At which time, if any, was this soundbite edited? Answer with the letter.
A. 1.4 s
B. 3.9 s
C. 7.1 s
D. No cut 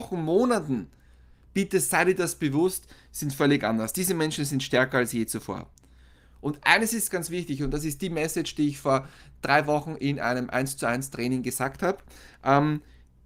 C